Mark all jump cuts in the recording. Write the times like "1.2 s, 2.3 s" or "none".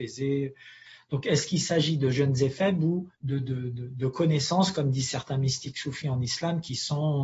3.1 s